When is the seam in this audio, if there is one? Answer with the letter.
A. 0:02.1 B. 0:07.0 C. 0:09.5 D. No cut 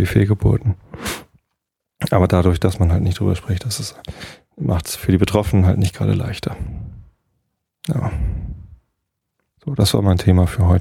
D